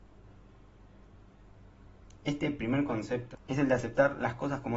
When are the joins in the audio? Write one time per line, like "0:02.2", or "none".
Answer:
0:02.2
0:03.3